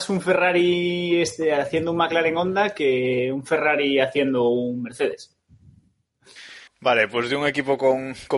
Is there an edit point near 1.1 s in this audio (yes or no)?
no